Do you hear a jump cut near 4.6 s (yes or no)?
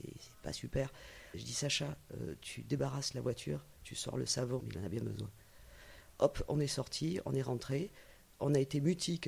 yes